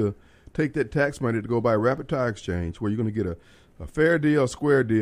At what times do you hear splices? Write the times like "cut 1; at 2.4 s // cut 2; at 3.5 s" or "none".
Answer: none